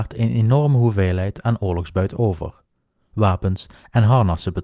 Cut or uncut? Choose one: cut